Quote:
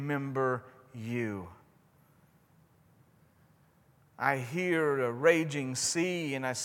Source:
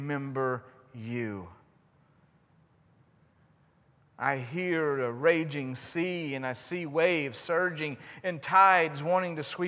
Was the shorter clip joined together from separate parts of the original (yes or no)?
no